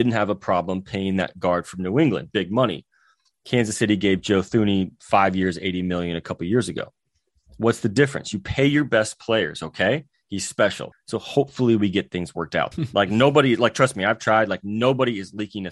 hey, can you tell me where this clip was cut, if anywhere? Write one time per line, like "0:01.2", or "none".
0:10.9
0:12.7